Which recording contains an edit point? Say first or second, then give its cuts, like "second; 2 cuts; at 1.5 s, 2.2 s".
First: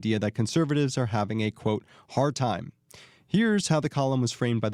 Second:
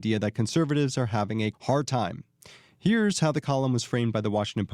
second; 1 cut; at 1.5 s